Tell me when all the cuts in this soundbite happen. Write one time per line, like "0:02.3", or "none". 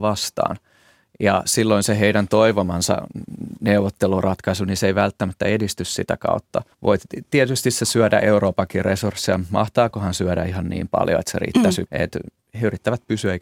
0:06.7
0:11.9